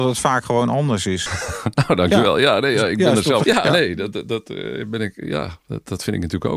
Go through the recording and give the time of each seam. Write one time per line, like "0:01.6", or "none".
0:01.3
0:03.4